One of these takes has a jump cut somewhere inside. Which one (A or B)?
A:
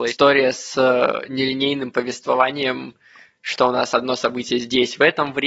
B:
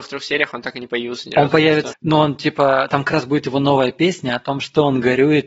B